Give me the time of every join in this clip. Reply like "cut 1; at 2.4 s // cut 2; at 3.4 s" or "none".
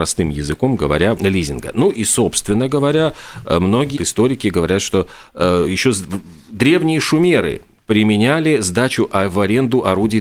cut 1; at 1.2 s // cut 2; at 4.0 s